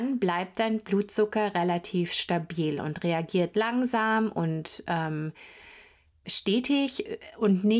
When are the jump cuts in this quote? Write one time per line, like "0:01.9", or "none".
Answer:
0:06.2